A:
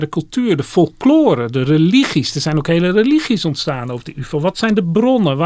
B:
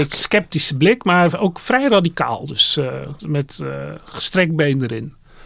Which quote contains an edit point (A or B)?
B